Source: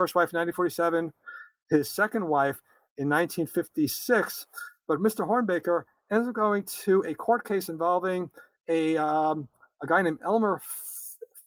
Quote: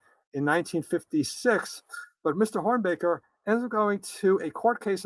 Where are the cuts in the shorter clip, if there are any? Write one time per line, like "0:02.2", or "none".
none